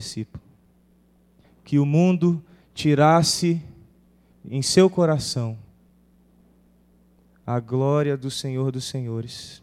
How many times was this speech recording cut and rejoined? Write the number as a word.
one